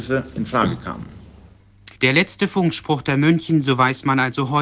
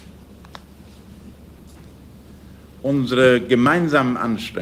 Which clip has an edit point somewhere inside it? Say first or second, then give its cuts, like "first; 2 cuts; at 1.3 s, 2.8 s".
first; 1 cut; at 2.0 s